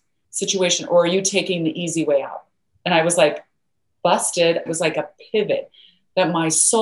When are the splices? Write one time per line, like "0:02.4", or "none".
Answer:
0:04.7